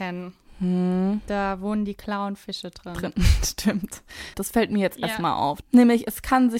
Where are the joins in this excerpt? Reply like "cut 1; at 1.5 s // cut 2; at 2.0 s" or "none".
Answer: cut 1; at 4.3 s // cut 2; at 5.6 s

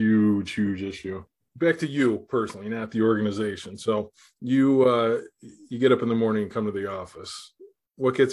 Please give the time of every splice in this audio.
cut 1; at 1.5 s

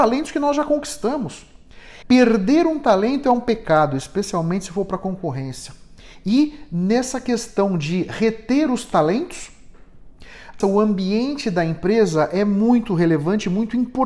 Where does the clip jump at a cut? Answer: cut 1; at 2.0 s // cut 2; at 10.6 s

